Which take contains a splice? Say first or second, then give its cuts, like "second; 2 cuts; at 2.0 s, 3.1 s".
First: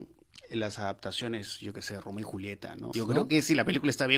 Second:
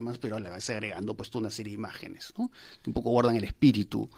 first; 1 cut; at 2.9 s